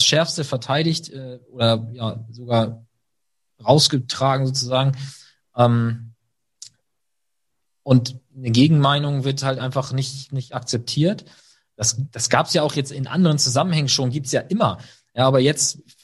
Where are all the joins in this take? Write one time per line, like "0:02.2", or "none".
none